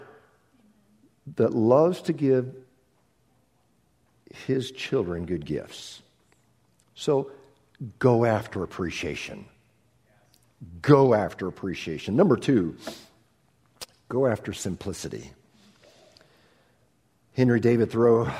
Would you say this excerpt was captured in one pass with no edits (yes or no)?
yes